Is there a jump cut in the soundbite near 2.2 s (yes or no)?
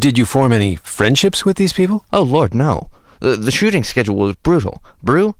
no